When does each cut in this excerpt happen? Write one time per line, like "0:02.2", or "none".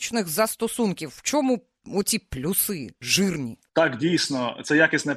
0:03.7